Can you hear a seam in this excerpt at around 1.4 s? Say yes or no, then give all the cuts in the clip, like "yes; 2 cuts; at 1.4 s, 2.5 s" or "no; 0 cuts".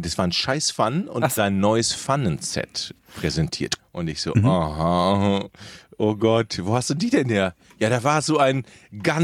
yes; 2 cuts; at 1.4 s, 3.8 s